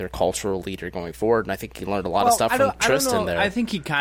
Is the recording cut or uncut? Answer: uncut